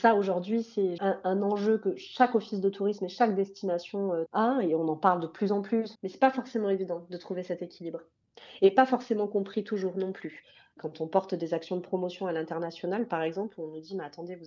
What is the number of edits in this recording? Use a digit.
3